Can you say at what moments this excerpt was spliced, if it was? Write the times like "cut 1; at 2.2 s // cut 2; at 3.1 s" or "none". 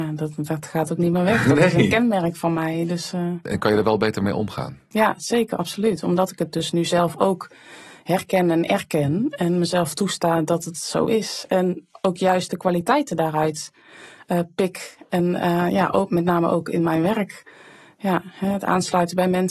none